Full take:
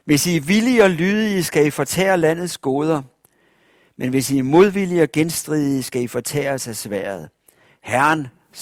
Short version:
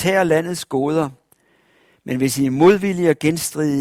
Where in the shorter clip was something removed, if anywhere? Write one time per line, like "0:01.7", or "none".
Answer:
none